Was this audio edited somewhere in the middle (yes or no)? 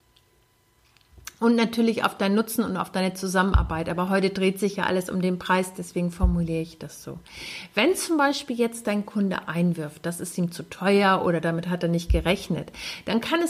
no